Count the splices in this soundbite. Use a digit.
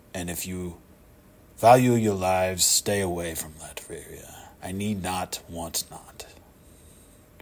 1